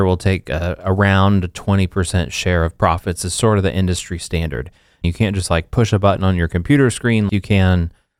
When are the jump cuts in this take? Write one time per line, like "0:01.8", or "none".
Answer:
0:05.0
0:07.3